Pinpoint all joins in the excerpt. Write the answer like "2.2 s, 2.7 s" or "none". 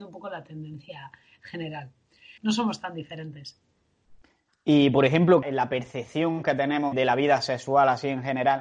2.4 s, 5.4 s, 6.9 s